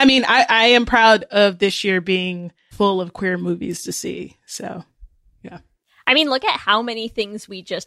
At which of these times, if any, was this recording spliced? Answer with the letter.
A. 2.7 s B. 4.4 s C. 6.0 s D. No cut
A